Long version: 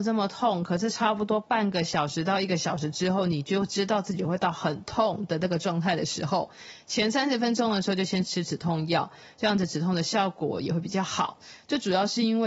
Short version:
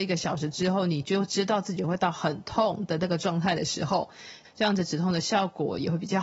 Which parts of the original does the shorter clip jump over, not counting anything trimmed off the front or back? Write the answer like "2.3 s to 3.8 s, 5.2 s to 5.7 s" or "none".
6.9 s to 9.3 s